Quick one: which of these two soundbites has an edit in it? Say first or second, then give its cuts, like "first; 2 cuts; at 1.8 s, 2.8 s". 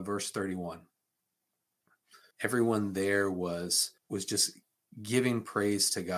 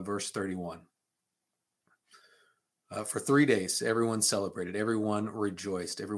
first; 2 cuts; at 2.3 s, 4.0 s